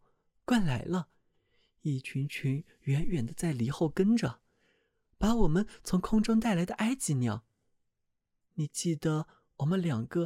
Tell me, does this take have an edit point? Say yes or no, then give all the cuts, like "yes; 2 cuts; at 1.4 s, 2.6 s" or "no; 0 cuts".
no; 0 cuts